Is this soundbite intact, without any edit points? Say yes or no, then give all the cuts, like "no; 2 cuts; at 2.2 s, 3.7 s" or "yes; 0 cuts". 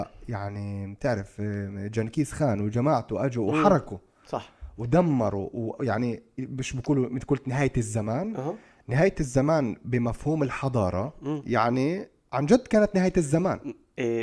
yes; 0 cuts